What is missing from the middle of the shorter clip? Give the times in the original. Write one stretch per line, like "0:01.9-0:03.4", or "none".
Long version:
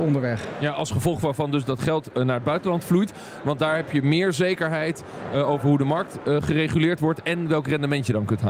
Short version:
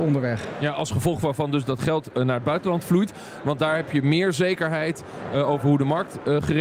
none